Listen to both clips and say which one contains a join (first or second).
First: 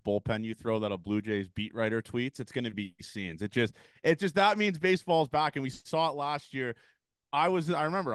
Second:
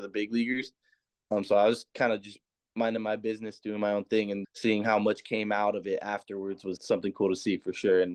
second